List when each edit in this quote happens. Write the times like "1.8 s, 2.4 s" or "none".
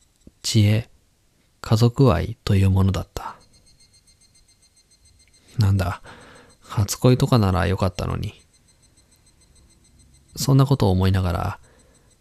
none